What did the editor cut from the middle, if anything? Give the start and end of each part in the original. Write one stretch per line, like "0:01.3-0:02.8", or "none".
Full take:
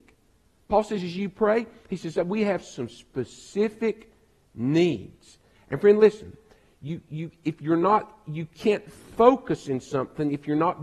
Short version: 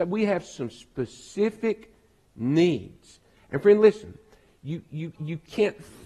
0:07.3-0:08.2

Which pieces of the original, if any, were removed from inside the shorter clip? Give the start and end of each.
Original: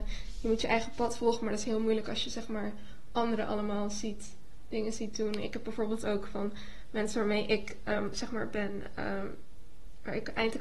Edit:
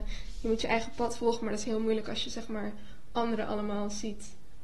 none

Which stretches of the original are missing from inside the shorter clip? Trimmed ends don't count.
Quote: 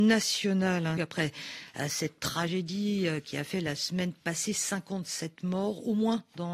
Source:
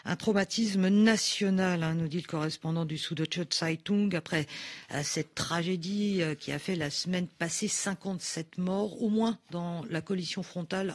0:01.9-0:04.1

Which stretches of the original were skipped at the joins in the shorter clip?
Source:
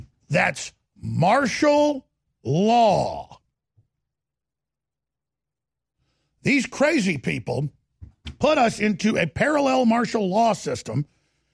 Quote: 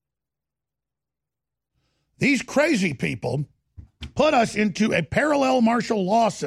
none

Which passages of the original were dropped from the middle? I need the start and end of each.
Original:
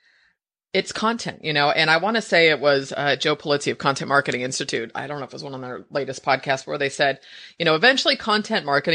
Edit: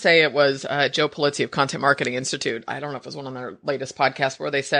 none

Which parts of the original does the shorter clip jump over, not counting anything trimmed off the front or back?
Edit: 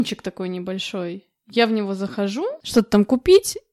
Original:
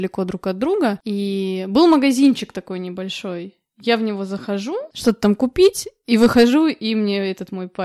none

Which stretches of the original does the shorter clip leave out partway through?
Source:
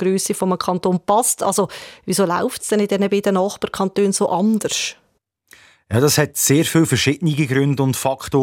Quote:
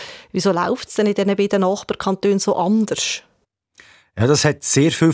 none

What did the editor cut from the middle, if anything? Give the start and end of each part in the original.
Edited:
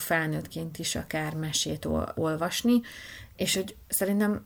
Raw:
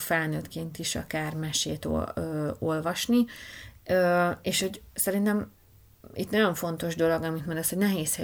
0:02.1-0:02.6
0:03.8-0:04.4

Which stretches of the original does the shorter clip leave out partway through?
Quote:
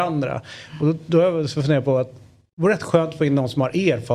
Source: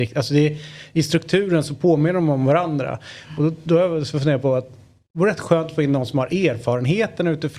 none

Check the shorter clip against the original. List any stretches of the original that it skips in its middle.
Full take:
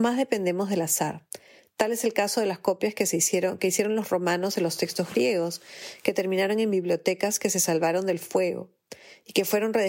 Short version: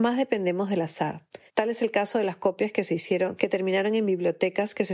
0:01.5-0:01.7
0:03.6-0:06.0

